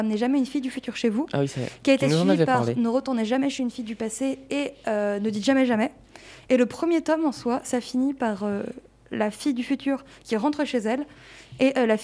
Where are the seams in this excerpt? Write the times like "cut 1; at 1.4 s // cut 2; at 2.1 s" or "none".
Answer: none